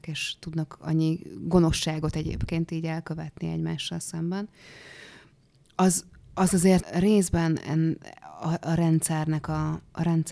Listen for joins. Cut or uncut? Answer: cut